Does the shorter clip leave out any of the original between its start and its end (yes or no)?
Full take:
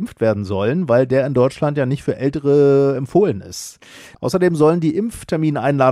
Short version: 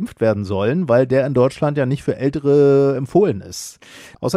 no